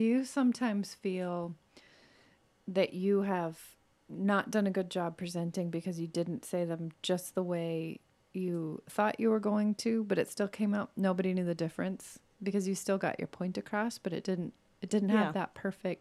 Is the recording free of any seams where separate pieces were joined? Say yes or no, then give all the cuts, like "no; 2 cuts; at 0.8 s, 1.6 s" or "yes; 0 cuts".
yes; 0 cuts